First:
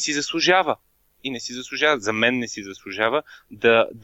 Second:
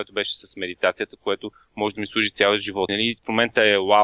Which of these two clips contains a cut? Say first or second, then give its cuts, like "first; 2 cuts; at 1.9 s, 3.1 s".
second; 1 cut; at 2.9 s